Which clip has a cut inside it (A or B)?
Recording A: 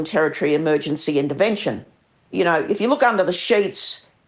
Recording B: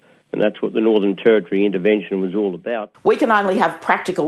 B